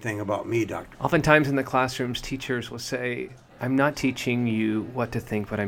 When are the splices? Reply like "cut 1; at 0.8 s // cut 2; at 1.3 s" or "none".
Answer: cut 1; at 0.9 s // cut 2; at 3.9 s